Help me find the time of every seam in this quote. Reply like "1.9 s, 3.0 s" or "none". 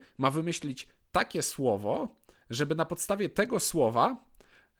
none